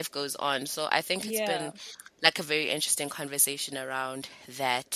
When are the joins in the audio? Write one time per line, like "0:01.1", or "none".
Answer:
none